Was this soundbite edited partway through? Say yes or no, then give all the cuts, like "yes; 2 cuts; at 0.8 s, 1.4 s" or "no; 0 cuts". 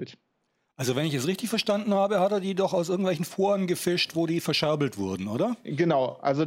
no; 0 cuts